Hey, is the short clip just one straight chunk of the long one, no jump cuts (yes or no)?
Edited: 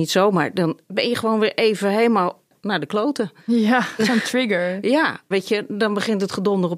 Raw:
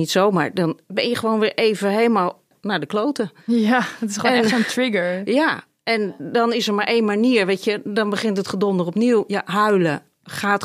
no